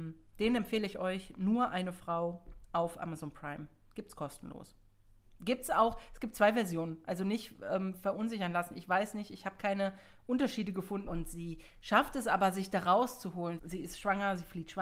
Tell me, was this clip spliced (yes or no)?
yes